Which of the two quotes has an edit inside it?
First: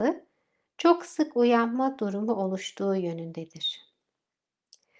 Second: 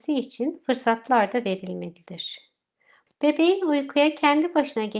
second; 1 cut; at 3.1 s

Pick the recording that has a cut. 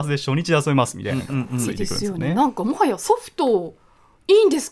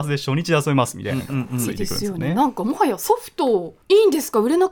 second; 1 cut; at 3.8 s

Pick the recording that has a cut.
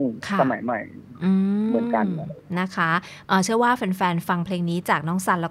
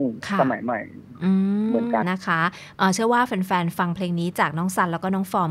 second; 1 cut; at 2.0 s

